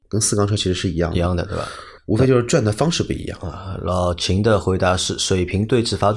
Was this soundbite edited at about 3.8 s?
no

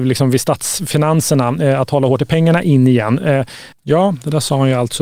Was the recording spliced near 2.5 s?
no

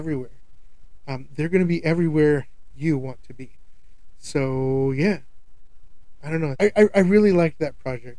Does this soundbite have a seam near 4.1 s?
no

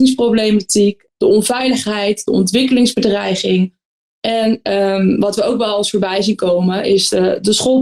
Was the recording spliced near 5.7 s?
no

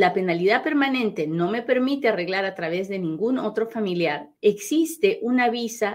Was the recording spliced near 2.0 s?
no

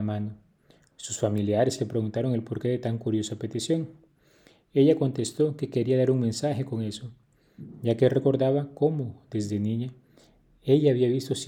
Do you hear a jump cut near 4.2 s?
no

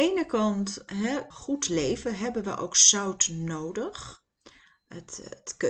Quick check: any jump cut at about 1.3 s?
yes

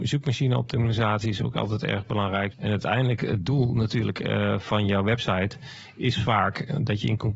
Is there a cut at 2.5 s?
yes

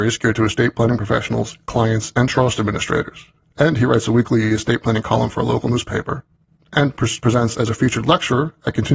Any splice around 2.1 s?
no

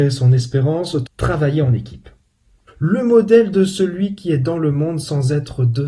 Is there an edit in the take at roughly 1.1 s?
yes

